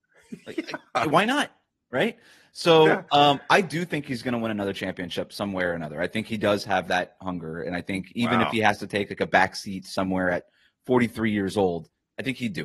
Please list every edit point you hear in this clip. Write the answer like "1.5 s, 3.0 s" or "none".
none